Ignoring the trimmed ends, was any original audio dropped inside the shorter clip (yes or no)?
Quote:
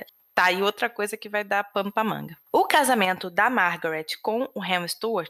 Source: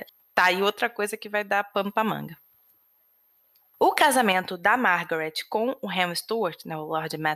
yes